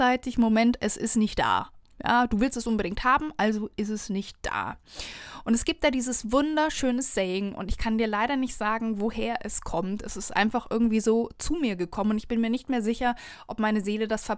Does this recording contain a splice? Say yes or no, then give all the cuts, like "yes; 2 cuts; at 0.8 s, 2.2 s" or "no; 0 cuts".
no; 0 cuts